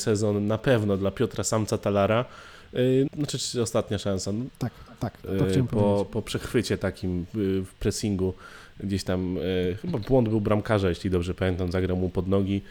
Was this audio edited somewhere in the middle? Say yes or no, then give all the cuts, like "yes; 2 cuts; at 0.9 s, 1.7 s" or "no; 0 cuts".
yes; 2 cuts; at 3.1 s, 4.5 s